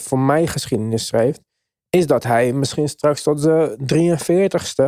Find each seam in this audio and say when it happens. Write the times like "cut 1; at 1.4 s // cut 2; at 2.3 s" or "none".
none